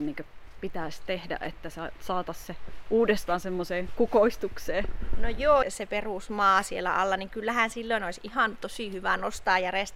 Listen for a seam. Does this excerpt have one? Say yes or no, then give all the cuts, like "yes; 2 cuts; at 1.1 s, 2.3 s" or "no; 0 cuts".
yes; 1 cut; at 5.6 s